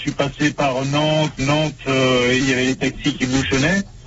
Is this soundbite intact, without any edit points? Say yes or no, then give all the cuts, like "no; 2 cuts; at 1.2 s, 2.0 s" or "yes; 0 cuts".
no; 2 cuts; at 1.4 s, 2.4 s